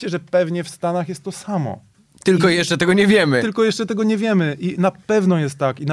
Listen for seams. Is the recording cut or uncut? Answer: uncut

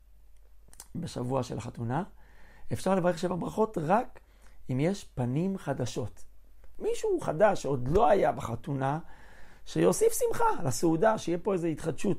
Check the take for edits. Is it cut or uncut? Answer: uncut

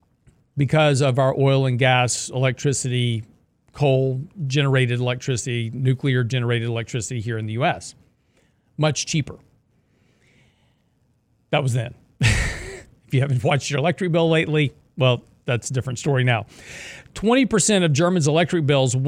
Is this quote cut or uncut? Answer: uncut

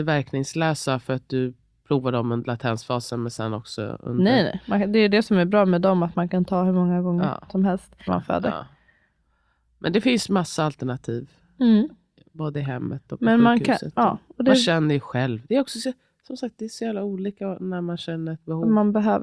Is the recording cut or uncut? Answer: cut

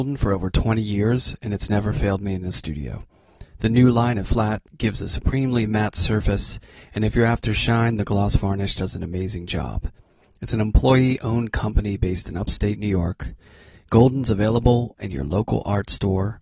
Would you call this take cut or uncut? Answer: cut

